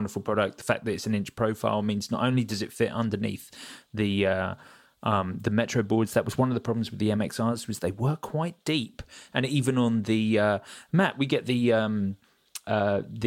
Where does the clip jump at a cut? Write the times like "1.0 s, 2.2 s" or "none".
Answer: none